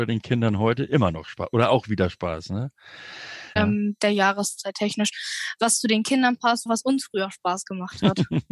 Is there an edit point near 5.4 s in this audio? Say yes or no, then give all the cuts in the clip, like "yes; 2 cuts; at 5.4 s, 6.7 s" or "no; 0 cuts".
no; 2 cuts; at 3.6 s, 6.7 s